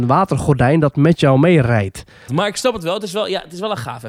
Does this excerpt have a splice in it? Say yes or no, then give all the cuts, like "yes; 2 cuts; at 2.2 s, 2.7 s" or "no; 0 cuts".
yes; 1 cut; at 2.3 s